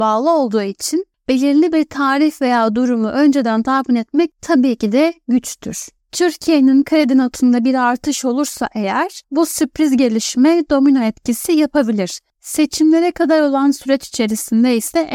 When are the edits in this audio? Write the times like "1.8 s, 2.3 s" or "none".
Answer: none